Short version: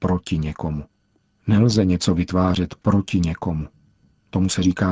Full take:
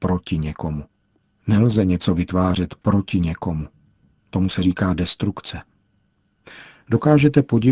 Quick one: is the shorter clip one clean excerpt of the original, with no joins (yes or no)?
yes